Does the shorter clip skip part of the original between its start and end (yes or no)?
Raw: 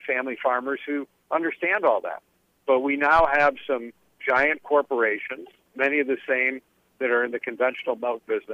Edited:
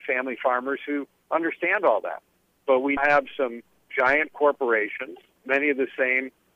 yes